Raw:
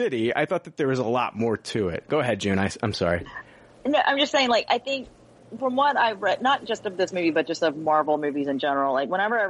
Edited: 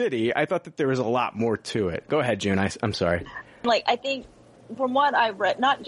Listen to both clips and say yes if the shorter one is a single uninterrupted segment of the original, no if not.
no